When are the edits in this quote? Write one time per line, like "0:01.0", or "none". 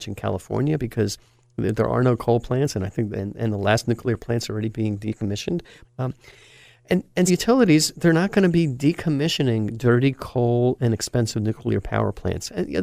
0:05.8
0:07.3